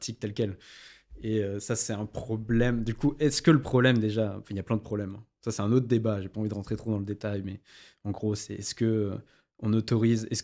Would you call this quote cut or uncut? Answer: uncut